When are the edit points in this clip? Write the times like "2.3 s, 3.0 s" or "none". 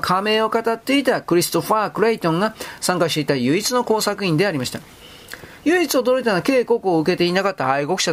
5.6 s